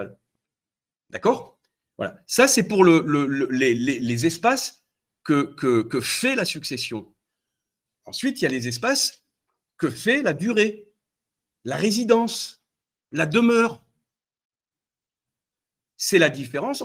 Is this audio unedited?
no; 1 cut; at 3.8 s

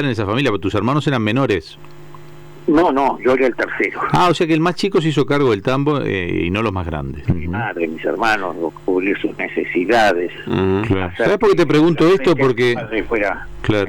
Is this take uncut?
no; 1 cut; at 7.3 s

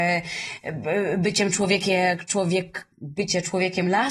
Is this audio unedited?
no; 1 cut; at 2.9 s

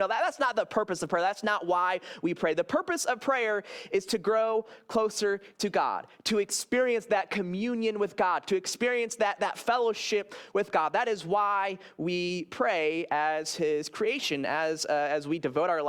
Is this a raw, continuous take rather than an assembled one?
yes; 0 cuts

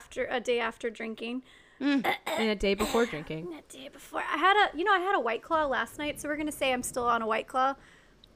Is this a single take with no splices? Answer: yes; 0 cuts

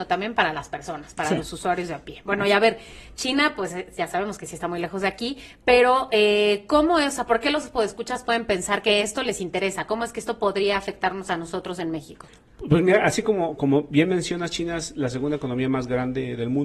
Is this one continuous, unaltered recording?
yes; 0 cuts

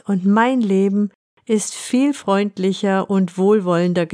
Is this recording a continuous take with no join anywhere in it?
yes; 0 cuts

